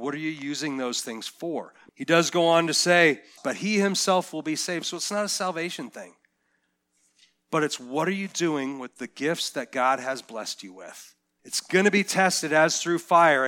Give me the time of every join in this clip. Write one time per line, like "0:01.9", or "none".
0:01.9
0:03.4
0:11.4